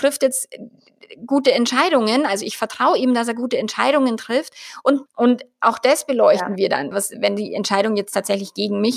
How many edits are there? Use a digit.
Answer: 2